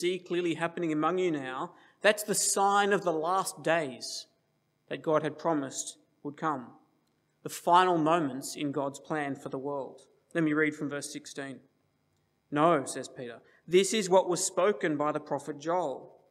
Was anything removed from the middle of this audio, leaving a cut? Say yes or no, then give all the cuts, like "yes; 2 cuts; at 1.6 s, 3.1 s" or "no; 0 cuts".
no; 0 cuts